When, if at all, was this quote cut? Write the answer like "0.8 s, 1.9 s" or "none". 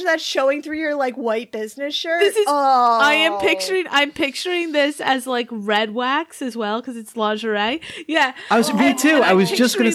none